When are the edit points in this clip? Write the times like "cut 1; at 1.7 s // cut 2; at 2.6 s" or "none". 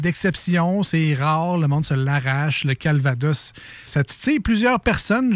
cut 1; at 3.9 s

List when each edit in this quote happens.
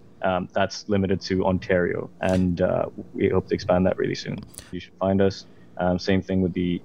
cut 1; at 2.1 s // cut 2; at 4.7 s

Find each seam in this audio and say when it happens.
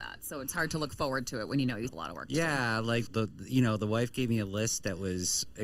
cut 1; at 1.9 s // cut 2; at 3.1 s

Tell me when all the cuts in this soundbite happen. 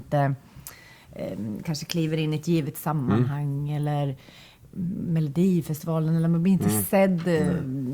none

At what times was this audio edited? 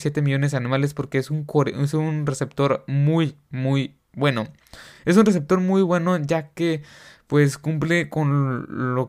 none

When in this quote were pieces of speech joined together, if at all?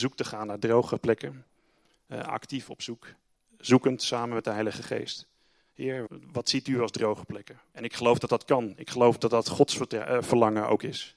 cut 1; at 6.1 s // cut 2; at 7.7 s

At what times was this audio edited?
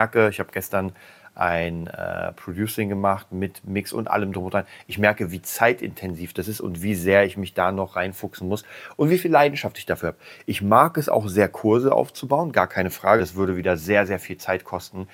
cut 1; at 13.2 s

